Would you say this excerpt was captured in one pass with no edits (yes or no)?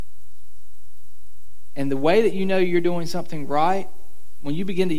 yes